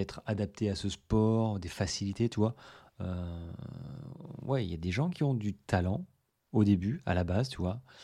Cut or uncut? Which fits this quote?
uncut